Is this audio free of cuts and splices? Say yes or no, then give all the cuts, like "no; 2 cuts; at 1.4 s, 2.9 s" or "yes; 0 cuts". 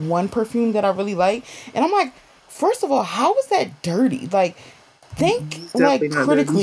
yes; 0 cuts